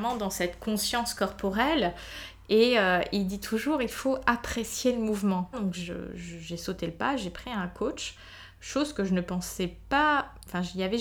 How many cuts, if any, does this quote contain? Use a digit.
1